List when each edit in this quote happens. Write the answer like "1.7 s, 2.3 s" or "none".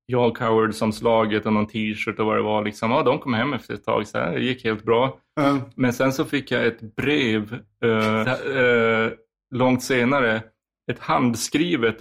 8.2 s